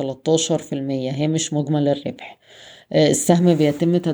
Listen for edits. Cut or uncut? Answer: uncut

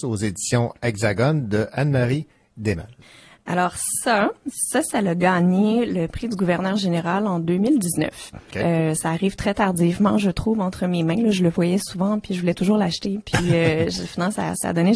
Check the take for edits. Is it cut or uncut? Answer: uncut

